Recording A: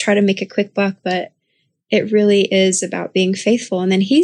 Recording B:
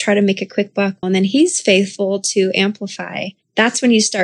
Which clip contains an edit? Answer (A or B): B